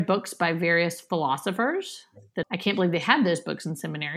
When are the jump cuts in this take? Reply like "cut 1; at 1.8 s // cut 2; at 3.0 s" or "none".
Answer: cut 1; at 2.4 s